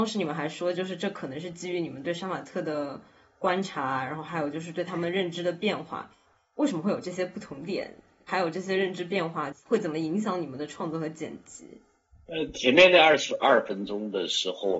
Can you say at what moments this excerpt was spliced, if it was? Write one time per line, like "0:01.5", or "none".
none

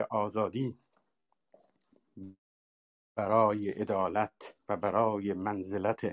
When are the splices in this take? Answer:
0:04.6

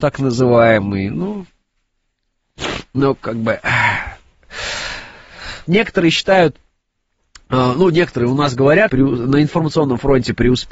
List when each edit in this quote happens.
0:05.7
0:08.9

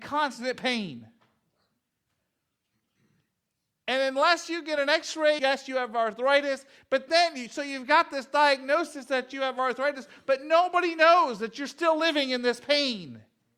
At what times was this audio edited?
0:05.4
0:07.1

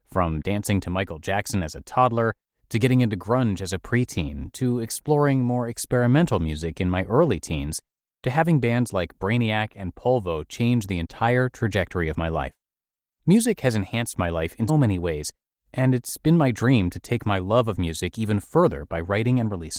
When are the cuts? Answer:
0:14.7

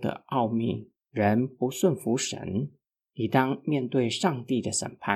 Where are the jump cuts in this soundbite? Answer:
0:01.0

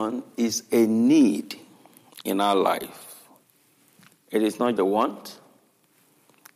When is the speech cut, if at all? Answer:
0:04.8

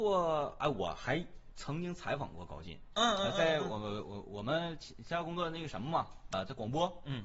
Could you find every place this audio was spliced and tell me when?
0:06.3

